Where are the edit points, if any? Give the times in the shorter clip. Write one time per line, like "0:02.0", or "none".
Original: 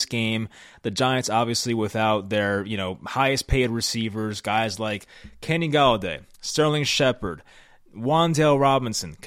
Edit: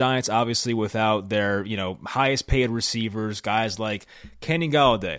none

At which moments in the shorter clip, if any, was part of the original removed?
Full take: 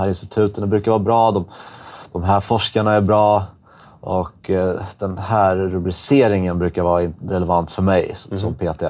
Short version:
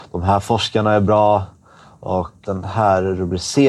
0:02.4

